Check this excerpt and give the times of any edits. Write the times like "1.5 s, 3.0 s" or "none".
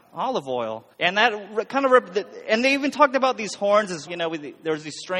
0.9 s, 4.1 s